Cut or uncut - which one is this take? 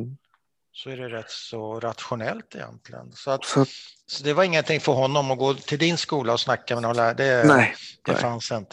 uncut